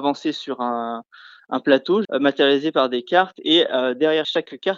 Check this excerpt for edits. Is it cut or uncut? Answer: cut